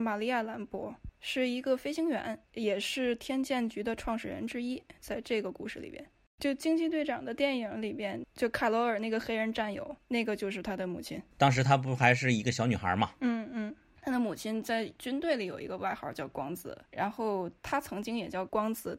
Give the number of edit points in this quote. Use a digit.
1